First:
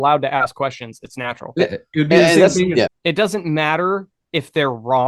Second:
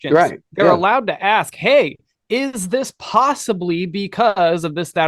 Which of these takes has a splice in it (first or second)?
first